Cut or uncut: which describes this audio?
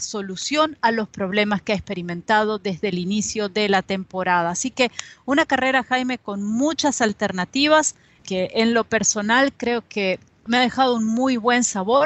cut